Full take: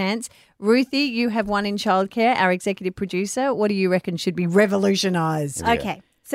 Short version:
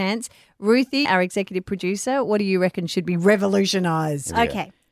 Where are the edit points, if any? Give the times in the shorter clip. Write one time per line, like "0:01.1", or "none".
0:01.0